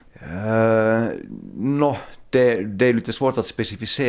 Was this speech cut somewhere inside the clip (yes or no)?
no